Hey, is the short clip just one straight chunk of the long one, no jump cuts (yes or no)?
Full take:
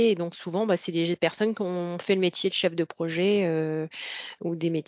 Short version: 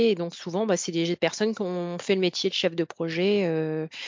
yes